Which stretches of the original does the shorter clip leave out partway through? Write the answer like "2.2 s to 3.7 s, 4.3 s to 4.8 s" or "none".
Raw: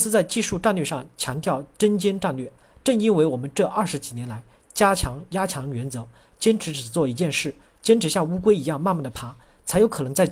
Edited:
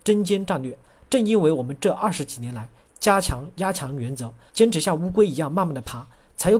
6.2 s to 7.8 s